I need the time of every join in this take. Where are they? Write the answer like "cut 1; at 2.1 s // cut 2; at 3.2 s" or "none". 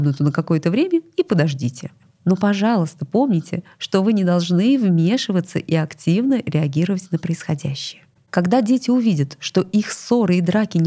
cut 1; at 2.1 s